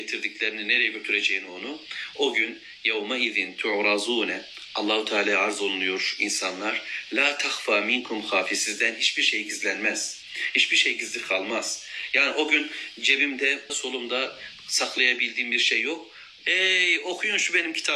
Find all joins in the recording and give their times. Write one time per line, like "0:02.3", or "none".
0:02.1
0:13.7
0:16.4